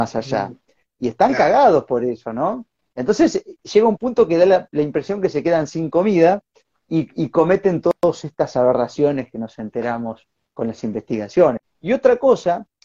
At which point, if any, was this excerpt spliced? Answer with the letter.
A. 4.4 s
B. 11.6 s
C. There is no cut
B